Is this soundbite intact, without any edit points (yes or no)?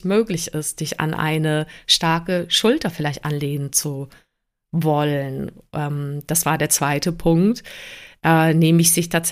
yes